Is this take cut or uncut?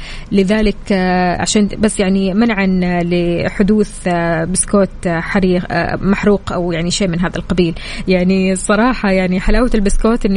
uncut